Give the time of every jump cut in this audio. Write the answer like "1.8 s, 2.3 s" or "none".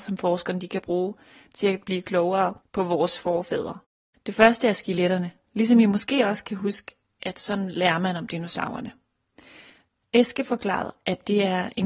10.0 s